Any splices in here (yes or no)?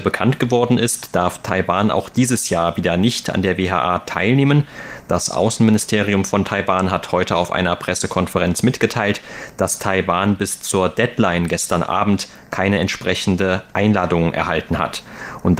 no